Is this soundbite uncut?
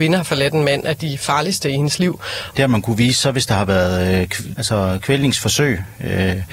no; 2 cuts; at 2.5 s, 4.6 s

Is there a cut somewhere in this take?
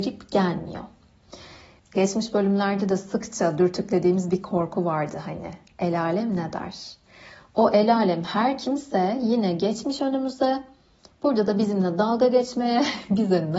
yes; 1 cut; at 1.8 s

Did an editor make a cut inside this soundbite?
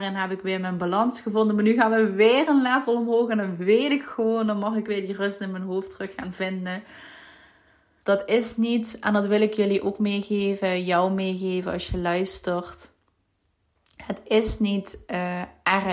yes; 1 cut; at 8.0 s

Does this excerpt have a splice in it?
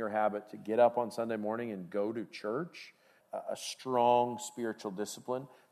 yes; 1 cut; at 3.2 s

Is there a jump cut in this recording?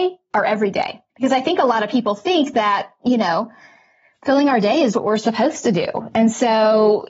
yes; 2 cuts; at 1.1 s, 4.9 s

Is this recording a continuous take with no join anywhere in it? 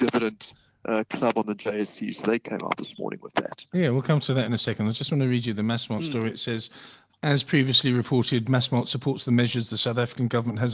yes; 0 cuts

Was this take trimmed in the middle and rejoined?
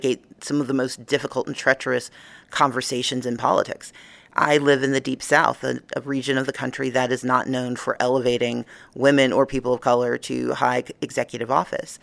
no; 0 cuts

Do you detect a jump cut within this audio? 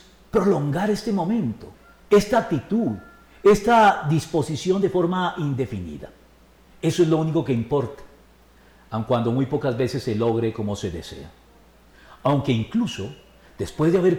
no; 0 cuts

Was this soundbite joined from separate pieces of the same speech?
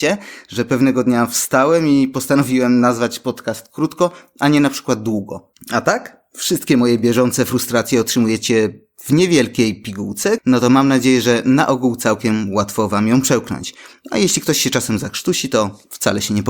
yes; 2 cuts; at 5.5 s, 10.4 s

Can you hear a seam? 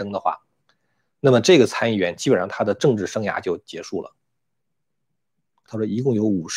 yes; 1 cut; at 5.7 s

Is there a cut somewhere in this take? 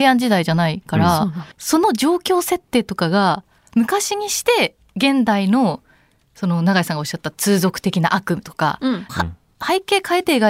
yes; 2 cuts; at 1.5 s, 9.1 s

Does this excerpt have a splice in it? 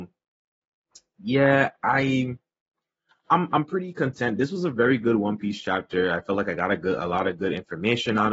no; 0 cuts

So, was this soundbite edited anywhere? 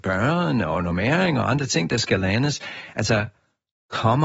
no; 0 cuts

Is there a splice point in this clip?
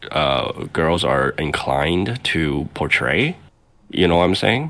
no; 0 cuts

